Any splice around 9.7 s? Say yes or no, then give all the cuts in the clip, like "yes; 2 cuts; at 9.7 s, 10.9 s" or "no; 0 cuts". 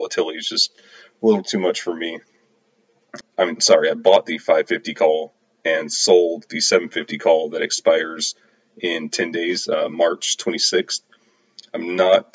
no; 1 cut; at 3.2 s